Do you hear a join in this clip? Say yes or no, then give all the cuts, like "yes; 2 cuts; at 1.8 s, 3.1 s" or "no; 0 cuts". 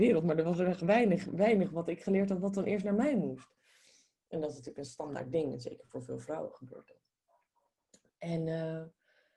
no; 0 cuts